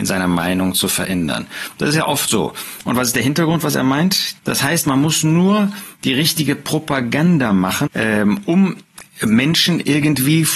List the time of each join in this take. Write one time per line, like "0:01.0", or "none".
0:02.8
0:04.4
0:07.9